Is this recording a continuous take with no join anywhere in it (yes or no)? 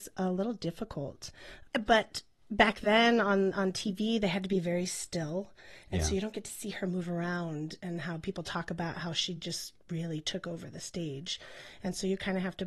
yes